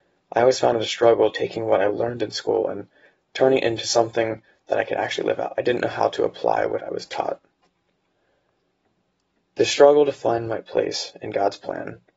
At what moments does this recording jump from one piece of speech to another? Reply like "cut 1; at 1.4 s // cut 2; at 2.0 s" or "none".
none